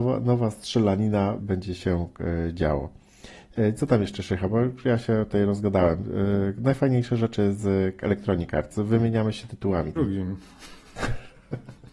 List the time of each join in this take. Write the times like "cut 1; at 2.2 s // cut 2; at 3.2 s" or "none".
cut 1; at 1.4 s // cut 2; at 10.0 s